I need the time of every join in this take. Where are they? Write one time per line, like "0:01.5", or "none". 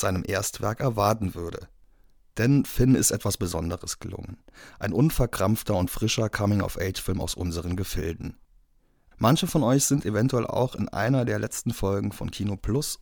0:02.3
0:09.1